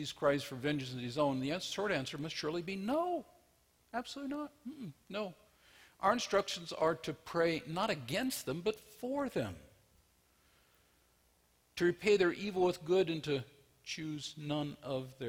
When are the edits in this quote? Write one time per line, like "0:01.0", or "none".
none